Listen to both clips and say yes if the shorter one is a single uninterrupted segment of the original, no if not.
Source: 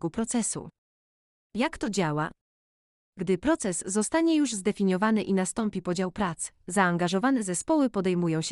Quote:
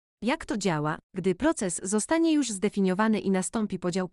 no